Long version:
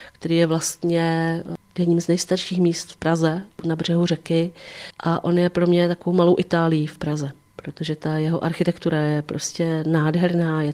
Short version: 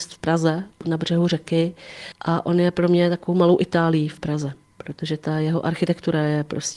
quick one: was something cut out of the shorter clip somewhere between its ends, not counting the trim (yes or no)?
no